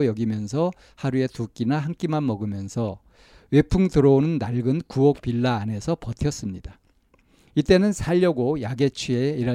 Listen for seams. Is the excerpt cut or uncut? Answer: uncut